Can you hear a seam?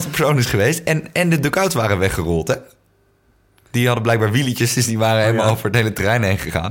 no; 0 cuts

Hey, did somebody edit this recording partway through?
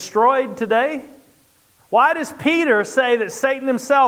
yes; 1 cut; at 1.8 s

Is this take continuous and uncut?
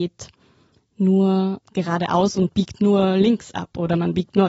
yes; 0 cuts

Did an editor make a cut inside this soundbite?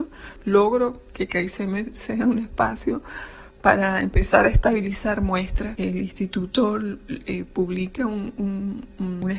yes; 2 cuts; at 5.8 s, 7.2 s

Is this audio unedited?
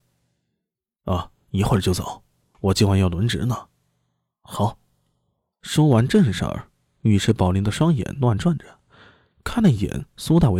yes; 0 cuts

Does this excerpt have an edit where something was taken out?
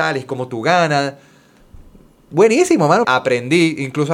yes; 1 cut; at 3.0 s

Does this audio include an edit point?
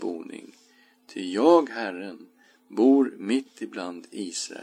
no; 0 cuts

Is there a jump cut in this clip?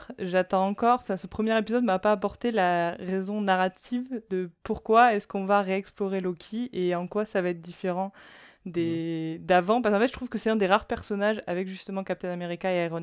no; 0 cuts

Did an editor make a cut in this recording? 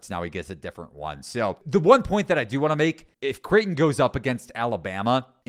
yes; 1 cut; at 3.1 s

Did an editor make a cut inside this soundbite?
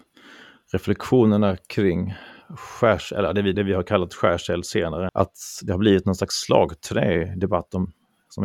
yes; 2 cuts; at 3.5 s, 5.1 s

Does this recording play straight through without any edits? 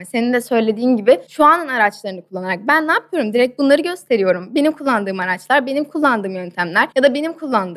yes; 0 cuts

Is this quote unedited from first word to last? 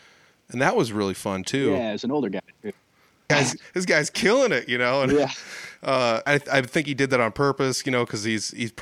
no; 2 cuts; at 3.3 s, 6.3 s

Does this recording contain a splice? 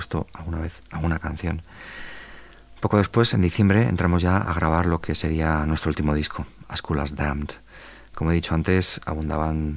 no; 0 cuts

